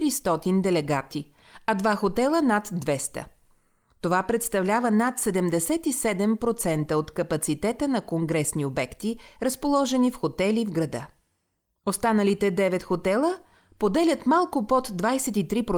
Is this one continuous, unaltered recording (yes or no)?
yes